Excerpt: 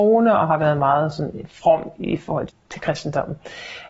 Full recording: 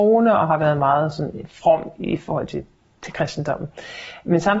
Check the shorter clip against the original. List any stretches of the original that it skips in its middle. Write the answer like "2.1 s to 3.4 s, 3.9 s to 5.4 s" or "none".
2.5 s to 2.8 s